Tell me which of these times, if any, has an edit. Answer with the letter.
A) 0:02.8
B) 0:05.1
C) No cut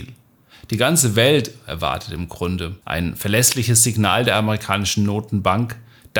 A